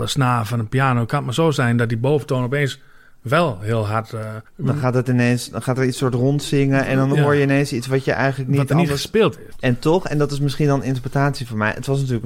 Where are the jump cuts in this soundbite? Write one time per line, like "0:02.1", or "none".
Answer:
0:04.5
0:09.5